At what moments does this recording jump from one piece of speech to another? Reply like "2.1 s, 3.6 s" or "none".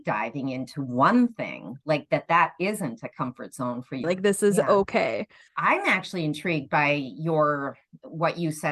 4.0 s, 5.5 s